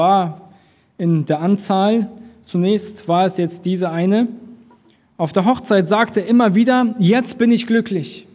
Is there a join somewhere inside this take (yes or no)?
no